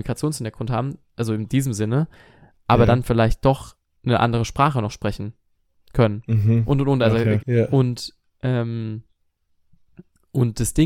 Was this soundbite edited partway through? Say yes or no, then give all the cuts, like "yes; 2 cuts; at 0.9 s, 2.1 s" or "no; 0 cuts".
yes; 1 cut; at 7.4 s